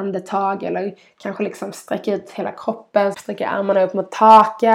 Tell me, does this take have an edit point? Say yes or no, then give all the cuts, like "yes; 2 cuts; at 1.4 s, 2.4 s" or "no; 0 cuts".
yes; 1 cut; at 3.1 s